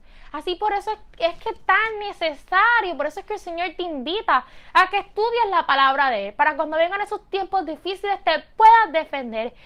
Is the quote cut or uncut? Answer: uncut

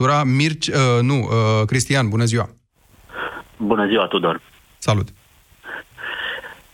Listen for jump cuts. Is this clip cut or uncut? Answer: uncut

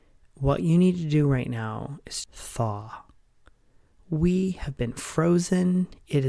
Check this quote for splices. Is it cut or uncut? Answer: cut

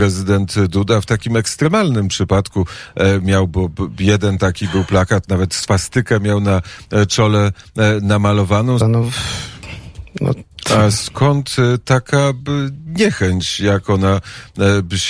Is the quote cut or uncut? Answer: cut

